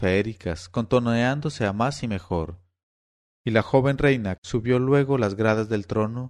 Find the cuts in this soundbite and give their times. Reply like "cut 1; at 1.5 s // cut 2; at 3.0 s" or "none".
cut 1; at 3.2 s // cut 2; at 4.4 s